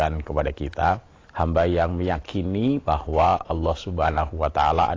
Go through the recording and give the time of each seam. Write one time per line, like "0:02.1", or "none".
0:01.2